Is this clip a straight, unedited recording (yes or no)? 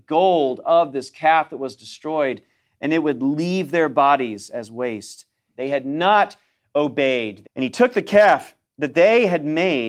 no